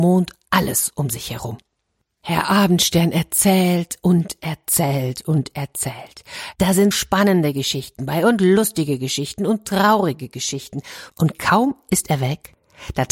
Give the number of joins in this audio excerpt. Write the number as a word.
two